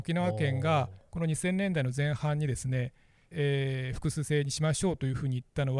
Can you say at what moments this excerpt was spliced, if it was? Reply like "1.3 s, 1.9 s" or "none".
3.3 s